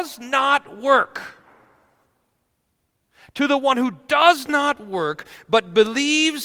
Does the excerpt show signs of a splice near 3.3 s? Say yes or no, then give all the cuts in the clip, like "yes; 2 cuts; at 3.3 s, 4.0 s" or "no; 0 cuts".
no; 0 cuts